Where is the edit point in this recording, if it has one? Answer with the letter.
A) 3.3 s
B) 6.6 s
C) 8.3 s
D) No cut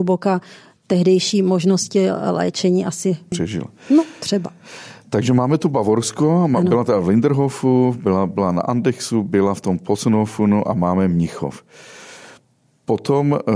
A